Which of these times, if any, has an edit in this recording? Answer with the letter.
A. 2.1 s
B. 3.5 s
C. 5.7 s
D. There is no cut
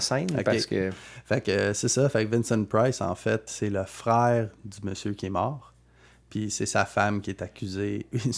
B